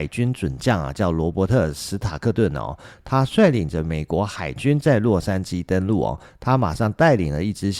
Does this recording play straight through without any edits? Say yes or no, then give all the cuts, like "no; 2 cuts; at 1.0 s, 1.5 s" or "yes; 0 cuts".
yes; 0 cuts